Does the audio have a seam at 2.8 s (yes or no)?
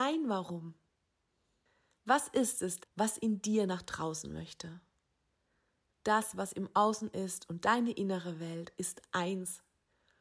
yes